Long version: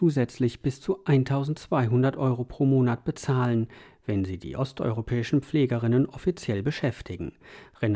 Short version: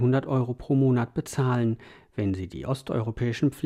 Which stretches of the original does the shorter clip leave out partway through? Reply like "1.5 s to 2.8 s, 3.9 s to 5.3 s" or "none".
none